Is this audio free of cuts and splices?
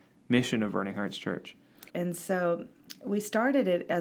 no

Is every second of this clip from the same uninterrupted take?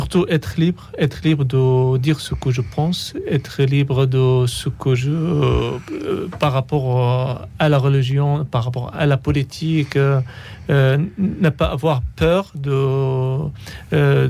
yes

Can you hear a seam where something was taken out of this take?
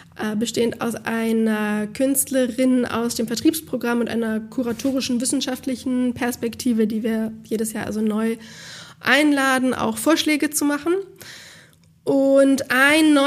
no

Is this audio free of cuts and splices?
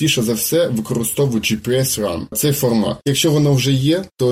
yes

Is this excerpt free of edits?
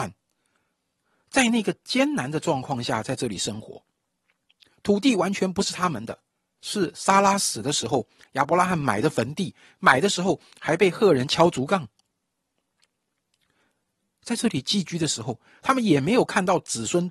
no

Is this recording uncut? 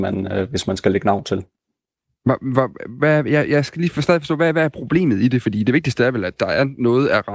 yes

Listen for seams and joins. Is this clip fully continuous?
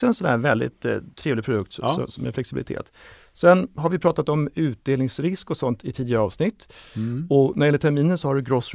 yes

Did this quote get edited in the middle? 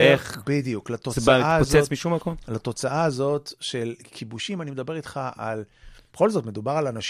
yes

